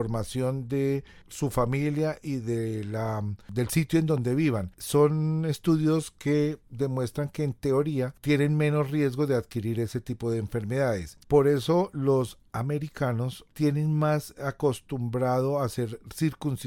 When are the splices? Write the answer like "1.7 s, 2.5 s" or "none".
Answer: 4.7 s, 11.2 s, 13.5 s

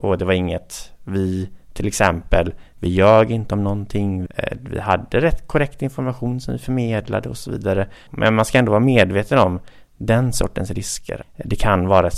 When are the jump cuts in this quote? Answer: 4.3 s, 8.1 s, 11.2 s

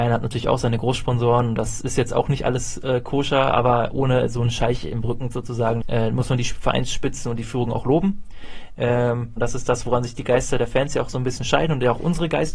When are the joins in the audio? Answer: 5.8 s, 9.4 s

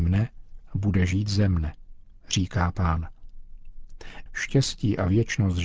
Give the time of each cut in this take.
4.3 s

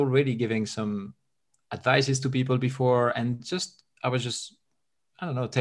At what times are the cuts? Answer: none

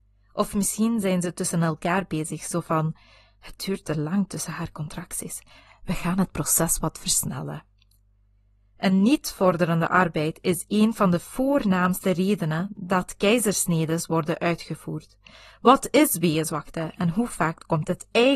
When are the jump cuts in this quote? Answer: none

